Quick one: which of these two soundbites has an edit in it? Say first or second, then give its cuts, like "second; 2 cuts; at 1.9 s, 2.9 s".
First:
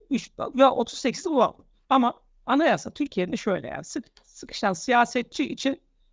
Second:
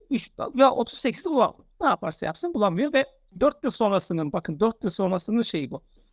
first; 1 cut; at 1.7 s